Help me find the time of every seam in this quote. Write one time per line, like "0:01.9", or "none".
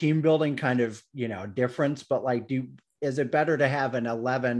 none